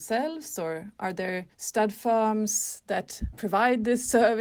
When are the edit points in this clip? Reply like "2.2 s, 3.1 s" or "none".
1.5 s